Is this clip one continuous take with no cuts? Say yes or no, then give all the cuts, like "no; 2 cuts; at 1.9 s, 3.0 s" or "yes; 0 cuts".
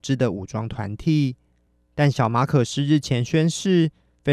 yes; 0 cuts